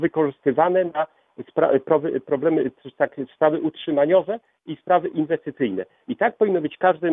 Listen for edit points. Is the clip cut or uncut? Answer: uncut